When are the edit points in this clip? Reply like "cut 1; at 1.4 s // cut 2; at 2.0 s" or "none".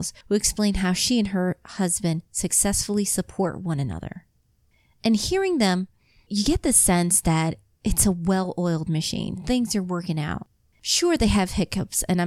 none